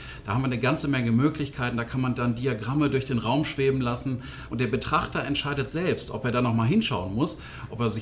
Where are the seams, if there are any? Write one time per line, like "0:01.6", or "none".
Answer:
0:04.5